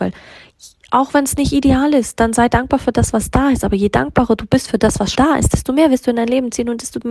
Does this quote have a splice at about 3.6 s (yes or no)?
no